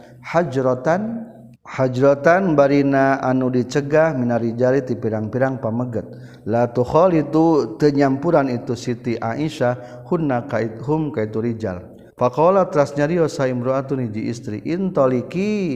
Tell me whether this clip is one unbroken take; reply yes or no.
no